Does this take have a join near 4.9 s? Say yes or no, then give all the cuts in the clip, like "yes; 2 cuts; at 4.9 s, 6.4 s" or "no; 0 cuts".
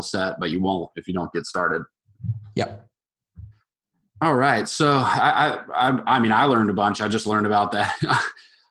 no; 0 cuts